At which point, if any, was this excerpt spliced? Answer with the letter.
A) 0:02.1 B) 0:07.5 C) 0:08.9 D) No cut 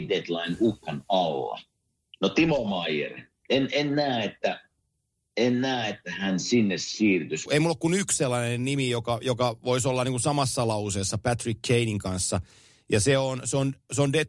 B